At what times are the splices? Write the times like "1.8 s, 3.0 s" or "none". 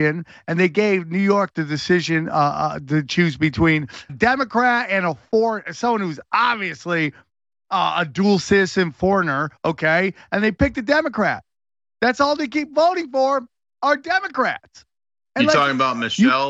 4.1 s